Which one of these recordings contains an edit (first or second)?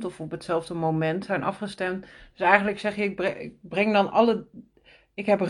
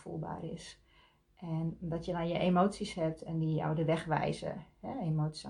second